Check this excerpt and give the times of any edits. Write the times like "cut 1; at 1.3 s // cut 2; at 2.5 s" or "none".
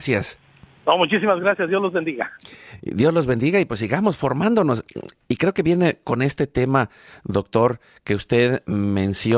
none